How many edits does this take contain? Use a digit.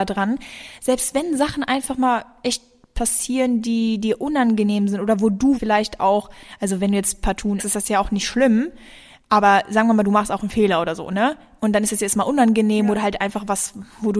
2